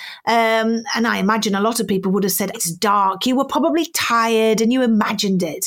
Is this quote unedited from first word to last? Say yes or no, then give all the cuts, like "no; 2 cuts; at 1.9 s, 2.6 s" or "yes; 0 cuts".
no; 1 cut; at 2.5 s